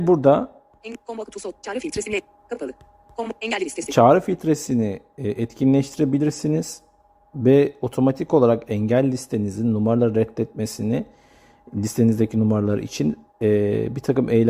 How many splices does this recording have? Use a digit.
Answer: 0